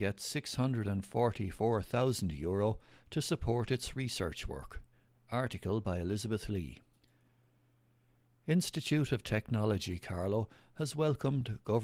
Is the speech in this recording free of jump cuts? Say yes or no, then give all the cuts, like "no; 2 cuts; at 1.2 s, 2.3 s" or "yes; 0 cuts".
yes; 0 cuts